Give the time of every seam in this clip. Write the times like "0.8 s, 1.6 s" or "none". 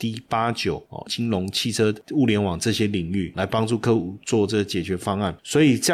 1.1 s